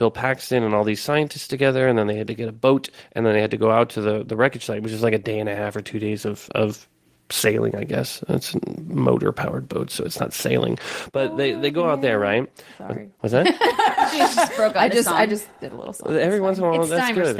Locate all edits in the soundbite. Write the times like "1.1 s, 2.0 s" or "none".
none

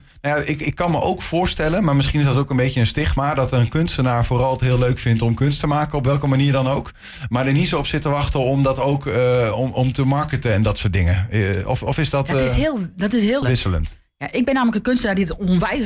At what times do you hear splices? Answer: 13.4 s

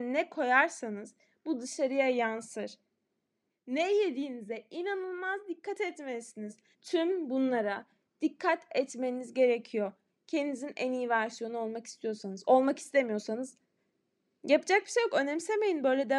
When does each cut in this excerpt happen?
3.5 s, 6.7 s

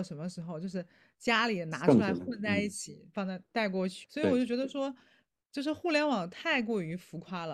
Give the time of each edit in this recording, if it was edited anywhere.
4.0 s

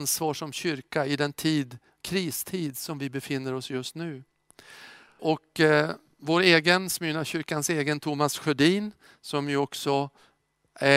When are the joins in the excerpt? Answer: 5.2 s

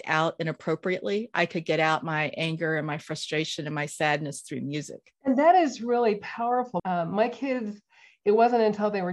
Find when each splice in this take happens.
6.8 s

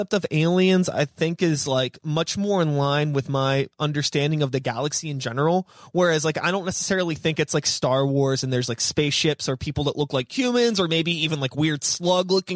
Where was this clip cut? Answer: none

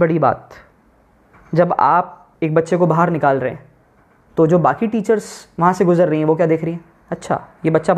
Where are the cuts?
2.3 s

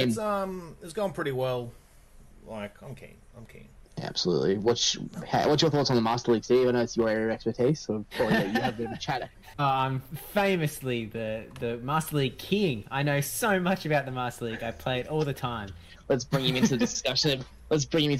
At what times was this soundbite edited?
9.5 s, 16.0 s

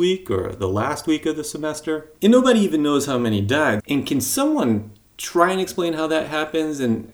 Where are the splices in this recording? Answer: 2.2 s, 3.8 s

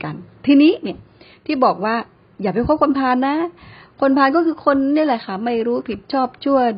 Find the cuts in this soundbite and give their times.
none

